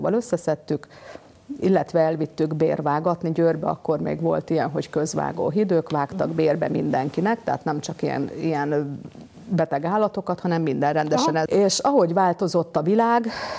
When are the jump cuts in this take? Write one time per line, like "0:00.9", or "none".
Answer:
0:11.5